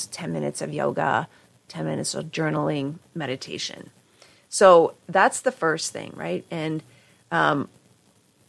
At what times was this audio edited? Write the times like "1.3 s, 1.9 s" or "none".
none